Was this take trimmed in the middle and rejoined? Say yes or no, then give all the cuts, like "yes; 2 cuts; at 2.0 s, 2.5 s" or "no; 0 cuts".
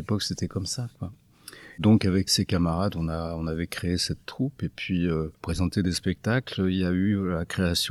yes; 1 cut; at 5.4 s